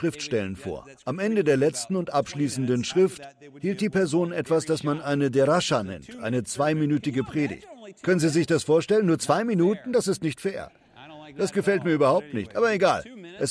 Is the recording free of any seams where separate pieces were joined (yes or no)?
yes